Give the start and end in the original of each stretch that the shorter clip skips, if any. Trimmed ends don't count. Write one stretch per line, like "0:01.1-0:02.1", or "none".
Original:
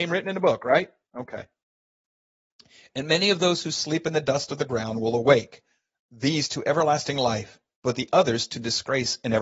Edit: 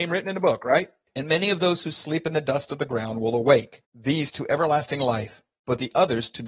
0:01.1-0:02.9
0:05.6-0:06.0